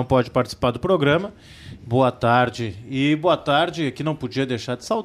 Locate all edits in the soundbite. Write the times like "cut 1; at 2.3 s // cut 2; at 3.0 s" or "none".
cut 1; at 1.8 s